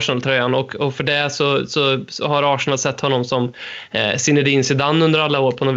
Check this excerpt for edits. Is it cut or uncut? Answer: uncut